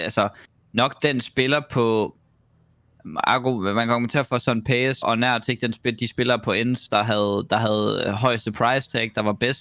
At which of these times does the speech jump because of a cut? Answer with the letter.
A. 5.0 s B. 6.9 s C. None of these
A